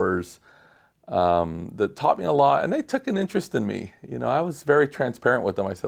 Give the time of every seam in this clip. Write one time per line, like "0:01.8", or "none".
none